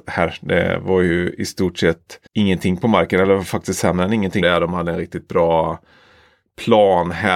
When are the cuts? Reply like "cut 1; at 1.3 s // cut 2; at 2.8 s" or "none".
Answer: cut 1; at 2.3 s // cut 2; at 4.4 s

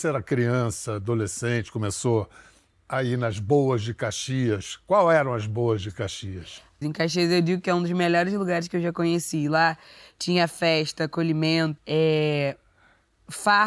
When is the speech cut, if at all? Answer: cut 1; at 6.8 s // cut 2; at 11.8 s

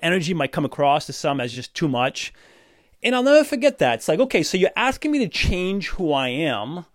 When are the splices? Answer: none

